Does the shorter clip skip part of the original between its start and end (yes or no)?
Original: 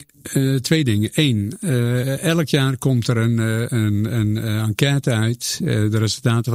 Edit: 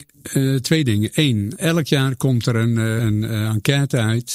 yes